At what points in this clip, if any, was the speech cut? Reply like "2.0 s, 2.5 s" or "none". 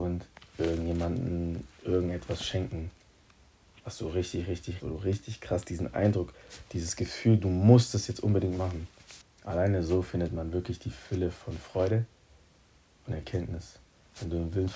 4.8 s

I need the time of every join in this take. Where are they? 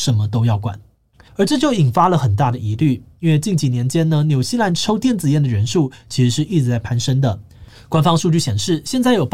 1.3 s

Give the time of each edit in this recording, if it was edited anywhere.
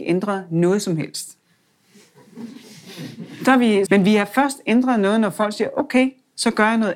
3.9 s

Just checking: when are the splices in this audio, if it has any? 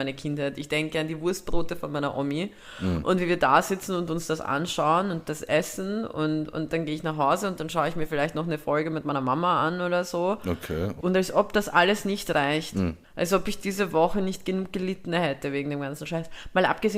11.0 s, 13.0 s

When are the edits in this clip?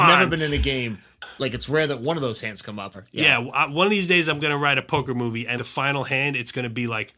2.9 s, 5.6 s

